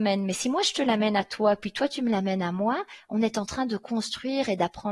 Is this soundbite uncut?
yes; 0 cuts

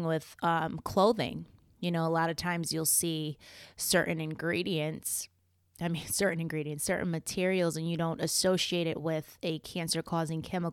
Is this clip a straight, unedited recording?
yes; 0 cuts

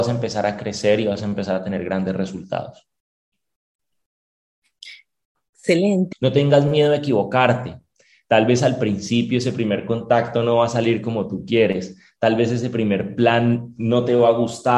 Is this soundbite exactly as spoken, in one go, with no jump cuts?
no; 1 cut; at 6.1 s

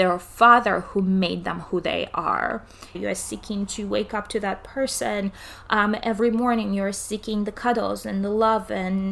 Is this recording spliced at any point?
yes; 1 cut; at 2.9 s

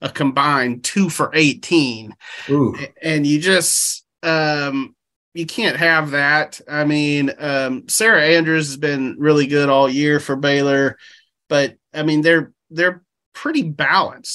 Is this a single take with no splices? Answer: yes; 0 cuts

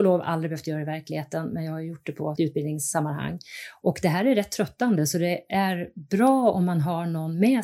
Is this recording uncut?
no; 1 cut; at 2.4 s

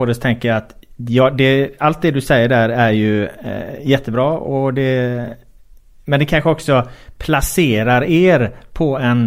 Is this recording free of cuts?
yes; 0 cuts

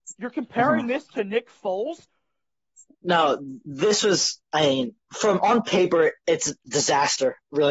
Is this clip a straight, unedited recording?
no; 1 cut; at 2.9 s

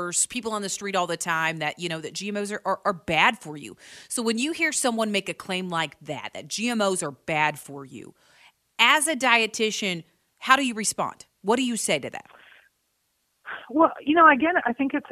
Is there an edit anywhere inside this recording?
no; 0 cuts

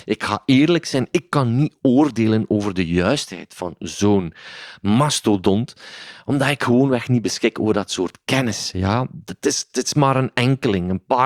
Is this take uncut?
yes; 0 cuts

